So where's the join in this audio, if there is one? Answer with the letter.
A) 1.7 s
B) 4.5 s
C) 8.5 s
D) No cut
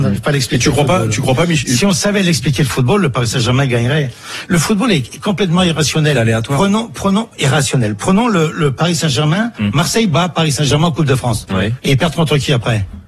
D